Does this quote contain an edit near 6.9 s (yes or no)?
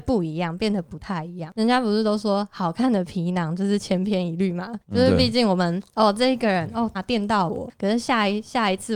yes